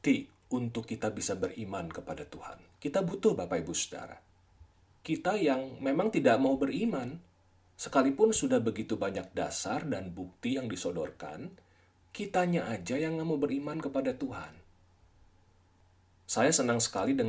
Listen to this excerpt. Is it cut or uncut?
cut